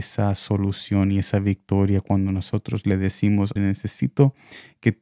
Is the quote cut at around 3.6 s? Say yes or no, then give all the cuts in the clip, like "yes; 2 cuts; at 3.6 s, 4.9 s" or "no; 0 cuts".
yes; 1 cut; at 3.6 s